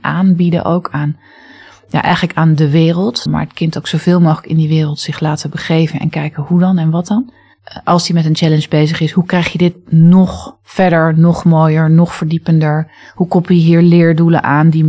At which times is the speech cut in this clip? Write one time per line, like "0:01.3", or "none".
0:03.3